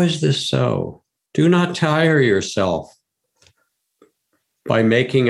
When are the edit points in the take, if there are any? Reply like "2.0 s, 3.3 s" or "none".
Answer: 1.3 s